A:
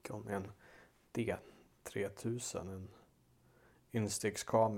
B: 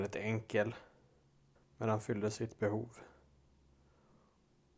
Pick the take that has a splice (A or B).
B